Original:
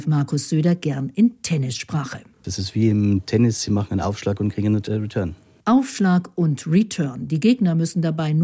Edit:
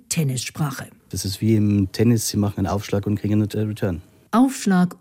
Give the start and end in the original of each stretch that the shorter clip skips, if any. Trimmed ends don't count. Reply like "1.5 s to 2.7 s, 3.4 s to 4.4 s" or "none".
none